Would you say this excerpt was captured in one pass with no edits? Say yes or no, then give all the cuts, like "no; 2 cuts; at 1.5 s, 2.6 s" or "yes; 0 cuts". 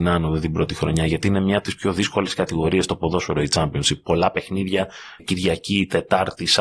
no; 1 cut; at 5.2 s